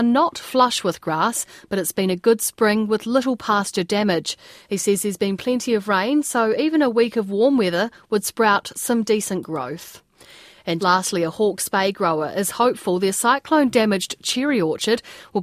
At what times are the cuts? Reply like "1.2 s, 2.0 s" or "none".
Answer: 10.8 s